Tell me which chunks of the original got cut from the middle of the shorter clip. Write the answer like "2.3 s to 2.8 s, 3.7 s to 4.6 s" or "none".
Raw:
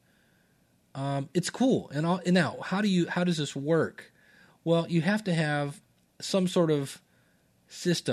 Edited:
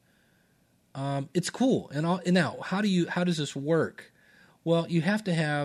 none